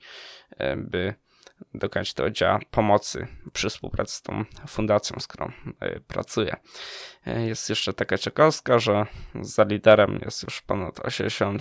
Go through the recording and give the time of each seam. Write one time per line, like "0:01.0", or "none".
none